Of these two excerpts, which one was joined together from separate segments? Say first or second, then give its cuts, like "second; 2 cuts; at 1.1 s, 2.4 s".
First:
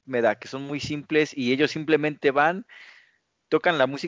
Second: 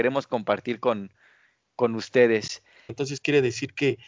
second; 1 cut; at 2.9 s